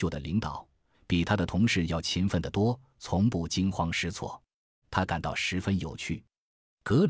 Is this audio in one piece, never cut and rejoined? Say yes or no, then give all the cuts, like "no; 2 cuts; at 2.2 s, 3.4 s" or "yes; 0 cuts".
no; 2 cuts; at 0.9 s, 4.8 s